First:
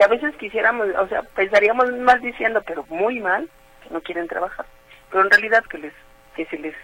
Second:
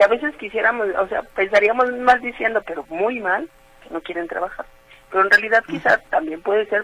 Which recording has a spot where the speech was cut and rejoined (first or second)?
first